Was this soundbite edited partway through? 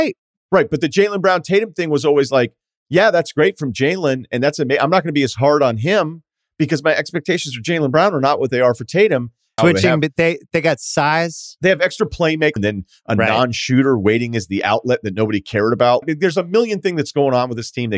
yes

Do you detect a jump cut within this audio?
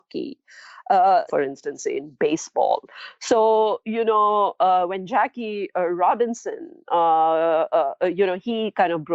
yes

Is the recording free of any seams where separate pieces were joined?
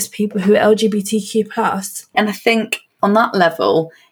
no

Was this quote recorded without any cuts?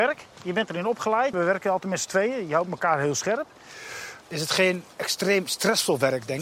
no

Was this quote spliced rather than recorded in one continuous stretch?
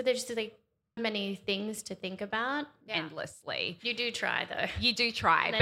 yes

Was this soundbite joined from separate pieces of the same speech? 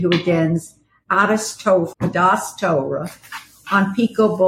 yes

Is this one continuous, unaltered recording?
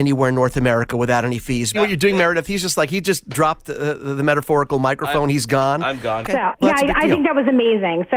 no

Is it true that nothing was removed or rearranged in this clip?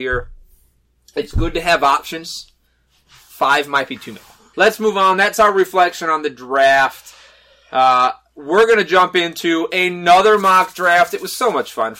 no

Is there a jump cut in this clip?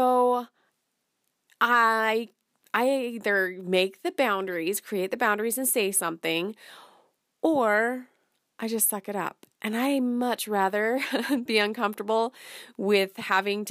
no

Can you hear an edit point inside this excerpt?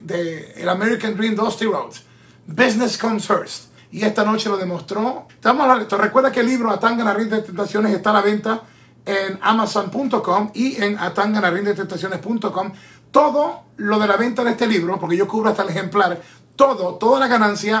yes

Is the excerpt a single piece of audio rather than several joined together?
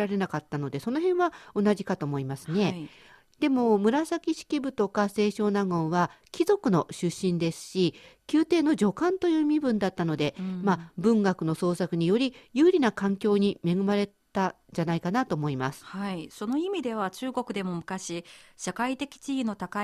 yes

